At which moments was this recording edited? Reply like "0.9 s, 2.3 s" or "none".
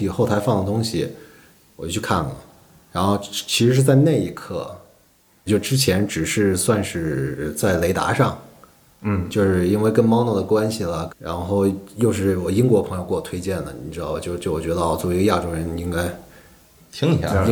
5.5 s, 11.1 s